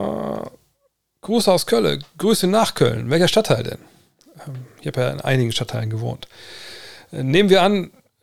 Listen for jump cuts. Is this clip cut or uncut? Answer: uncut